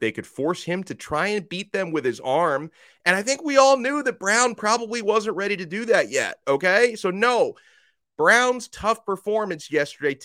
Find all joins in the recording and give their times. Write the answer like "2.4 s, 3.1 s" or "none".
none